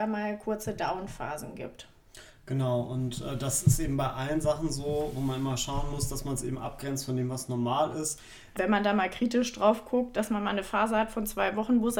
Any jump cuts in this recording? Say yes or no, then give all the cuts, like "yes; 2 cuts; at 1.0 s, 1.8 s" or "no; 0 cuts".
yes; 1 cut; at 8.5 s